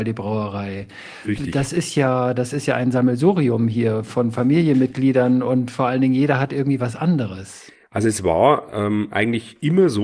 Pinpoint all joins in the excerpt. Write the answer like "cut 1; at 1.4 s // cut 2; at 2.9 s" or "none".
none